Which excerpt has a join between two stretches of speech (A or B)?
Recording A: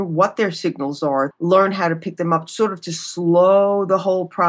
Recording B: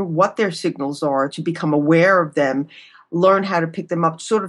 A